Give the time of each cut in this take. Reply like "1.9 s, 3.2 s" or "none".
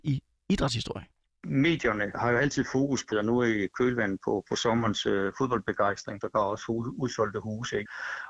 3.1 s, 4.4 s, 6.2 s

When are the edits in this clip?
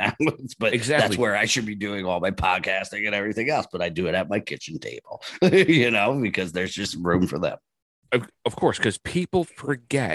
none

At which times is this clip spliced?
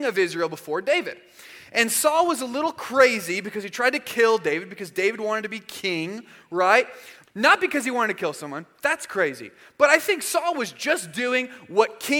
7.2 s

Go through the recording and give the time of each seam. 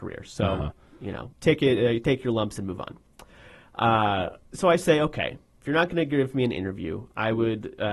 1.3 s

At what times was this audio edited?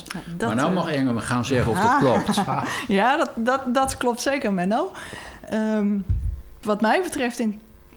6.6 s

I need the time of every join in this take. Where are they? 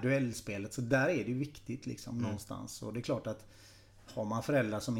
none

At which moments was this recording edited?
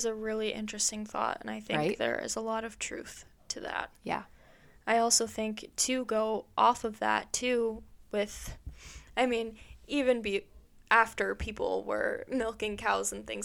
none

